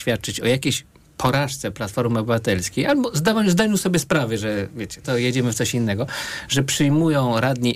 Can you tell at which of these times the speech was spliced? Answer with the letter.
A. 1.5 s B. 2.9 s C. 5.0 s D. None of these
C